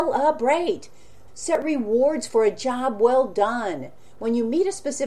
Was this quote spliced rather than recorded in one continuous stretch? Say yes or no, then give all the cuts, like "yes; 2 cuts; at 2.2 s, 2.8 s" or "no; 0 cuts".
yes; 1 cut; at 1.3 s